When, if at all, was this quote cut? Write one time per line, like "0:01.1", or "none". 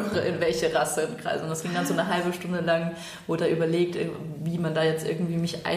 none